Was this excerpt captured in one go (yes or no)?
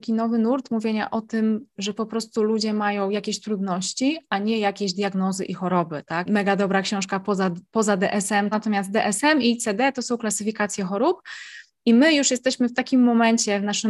no